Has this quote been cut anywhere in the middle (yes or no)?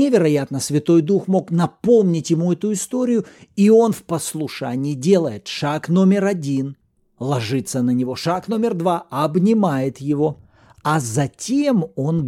no